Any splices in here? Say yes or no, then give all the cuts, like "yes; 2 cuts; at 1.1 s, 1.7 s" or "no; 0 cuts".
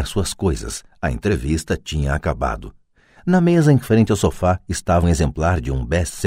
yes; 1 cut; at 5.0 s